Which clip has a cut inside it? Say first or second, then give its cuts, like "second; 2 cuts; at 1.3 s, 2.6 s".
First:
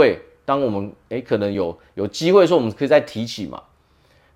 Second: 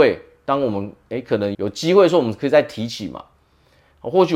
second; 1 cut; at 1.5 s